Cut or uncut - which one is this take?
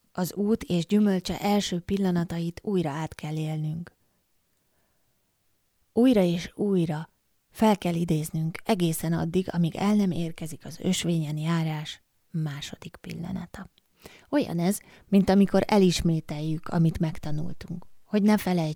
uncut